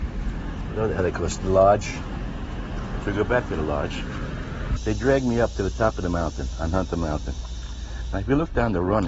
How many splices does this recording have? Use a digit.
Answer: 2